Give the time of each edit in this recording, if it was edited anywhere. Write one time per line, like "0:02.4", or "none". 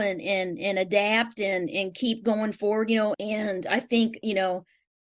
0:03.1